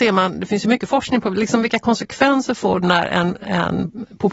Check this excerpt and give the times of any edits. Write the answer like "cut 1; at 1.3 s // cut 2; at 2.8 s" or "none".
none